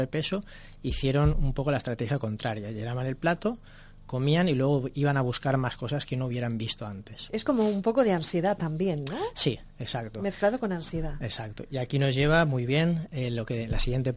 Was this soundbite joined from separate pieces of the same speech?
no; 0 cuts

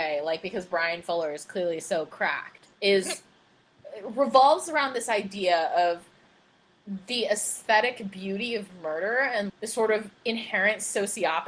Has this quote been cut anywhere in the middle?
yes; 2 cuts; at 2.7 s, 9.5 s

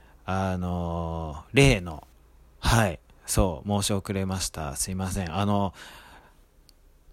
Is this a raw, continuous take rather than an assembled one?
yes; 0 cuts

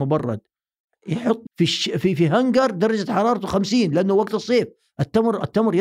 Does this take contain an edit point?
yes; 1 cut; at 1.4 s

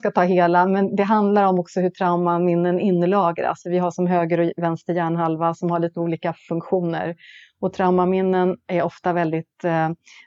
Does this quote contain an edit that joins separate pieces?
no; 0 cuts

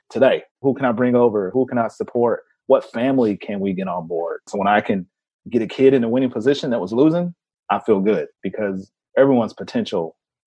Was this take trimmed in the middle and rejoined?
yes; 2 cuts; at 4.5 s, 8.3 s

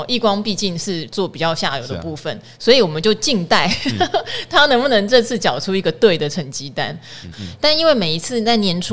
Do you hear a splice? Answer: yes; 1 cut; at 7.3 s

